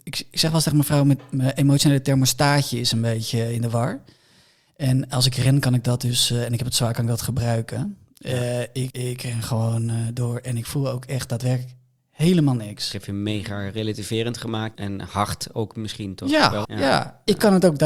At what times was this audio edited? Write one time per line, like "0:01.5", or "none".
0:08.9
0:14.7
0:16.6

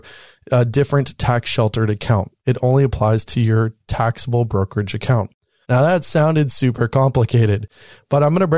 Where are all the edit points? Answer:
0:02.4
0:05.6

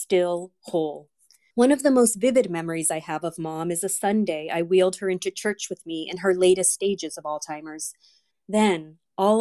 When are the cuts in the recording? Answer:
0:01.5
0:08.3

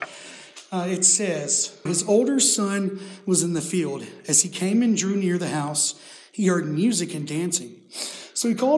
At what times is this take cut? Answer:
0:01.9

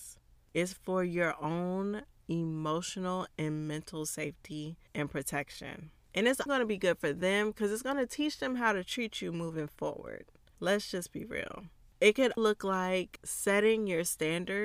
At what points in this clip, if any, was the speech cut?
0:04.9
0:06.5
0:12.4

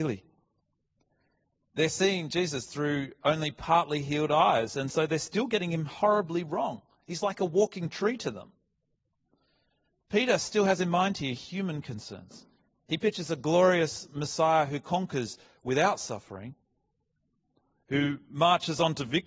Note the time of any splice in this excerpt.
none

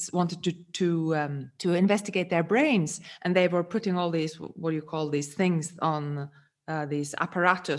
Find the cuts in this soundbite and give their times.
0:01.6

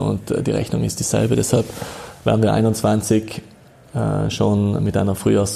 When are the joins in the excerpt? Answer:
none

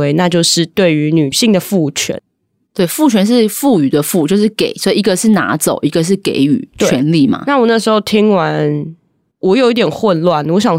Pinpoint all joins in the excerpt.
none

